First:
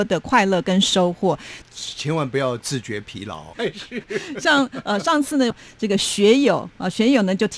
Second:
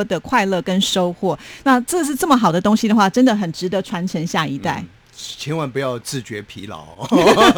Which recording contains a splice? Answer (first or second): first